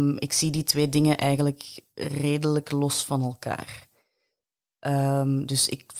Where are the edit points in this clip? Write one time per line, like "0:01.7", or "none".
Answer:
none